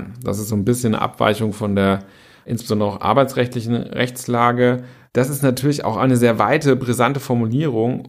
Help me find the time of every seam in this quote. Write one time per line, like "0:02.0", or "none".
none